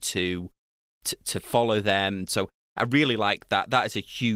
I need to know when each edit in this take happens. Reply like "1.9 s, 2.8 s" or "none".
2.3 s